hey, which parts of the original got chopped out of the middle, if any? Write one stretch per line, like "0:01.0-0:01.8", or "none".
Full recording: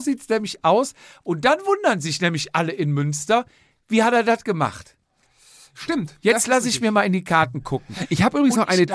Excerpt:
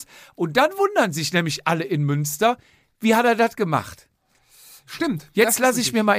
none